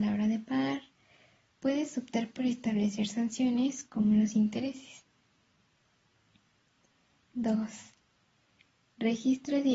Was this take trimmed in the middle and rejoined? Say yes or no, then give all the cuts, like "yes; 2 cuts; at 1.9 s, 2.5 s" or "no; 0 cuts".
no; 0 cuts